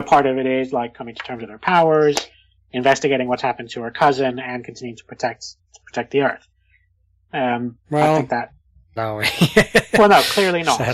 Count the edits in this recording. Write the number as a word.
one